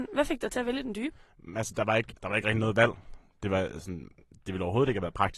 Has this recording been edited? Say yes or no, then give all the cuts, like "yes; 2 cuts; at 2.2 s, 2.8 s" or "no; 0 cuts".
yes; 1 cut; at 2.1 s